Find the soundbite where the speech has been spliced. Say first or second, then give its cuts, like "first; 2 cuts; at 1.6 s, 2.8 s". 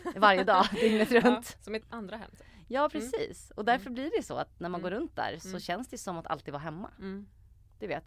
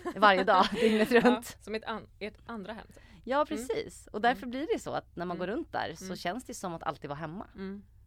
first; 1 cut; at 1.8 s